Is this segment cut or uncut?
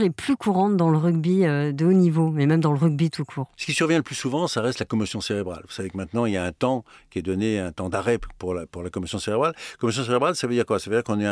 uncut